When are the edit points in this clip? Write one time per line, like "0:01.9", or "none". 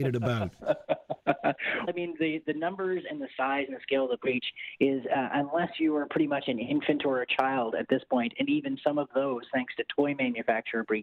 0:01.9